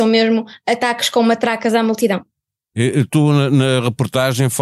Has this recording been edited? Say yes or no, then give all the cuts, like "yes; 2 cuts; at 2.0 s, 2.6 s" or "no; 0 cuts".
no; 0 cuts